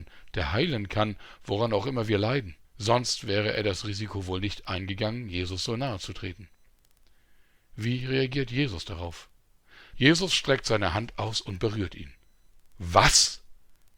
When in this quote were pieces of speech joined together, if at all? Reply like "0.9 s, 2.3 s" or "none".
2.6 s, 9.9 s